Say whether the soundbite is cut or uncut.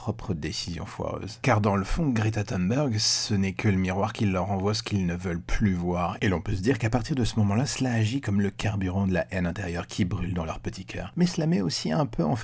uncut